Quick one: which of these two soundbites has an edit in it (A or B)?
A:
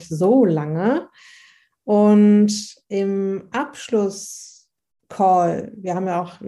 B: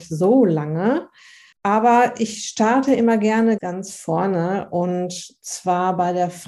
B